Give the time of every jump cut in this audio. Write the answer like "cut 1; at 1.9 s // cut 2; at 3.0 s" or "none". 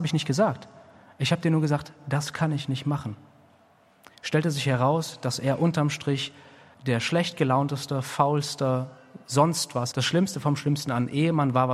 cut 1; at 6.7 s // cut 2; at 9.9 s